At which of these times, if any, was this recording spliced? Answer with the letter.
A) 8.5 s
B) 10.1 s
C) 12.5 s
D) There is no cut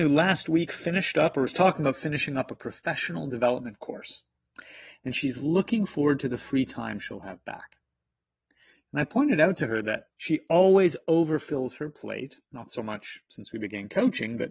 B